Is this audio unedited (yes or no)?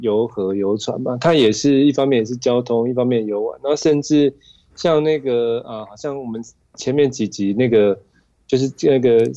yes